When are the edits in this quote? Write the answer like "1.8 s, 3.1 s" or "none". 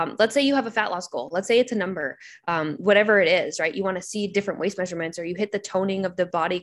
none

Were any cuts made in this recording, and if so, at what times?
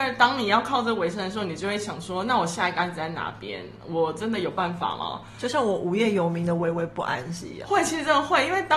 none

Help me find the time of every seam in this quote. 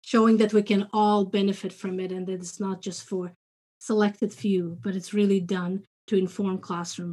none

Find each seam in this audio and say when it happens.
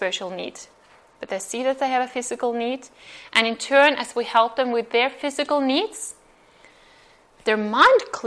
none

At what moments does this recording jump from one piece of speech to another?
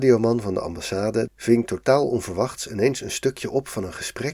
1.3 s

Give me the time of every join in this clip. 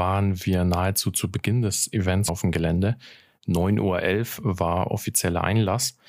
2.3 s

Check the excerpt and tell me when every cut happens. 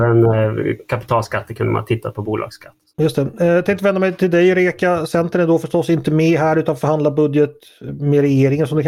none

